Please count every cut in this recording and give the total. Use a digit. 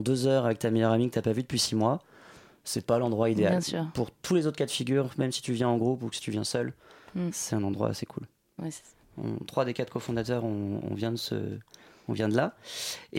1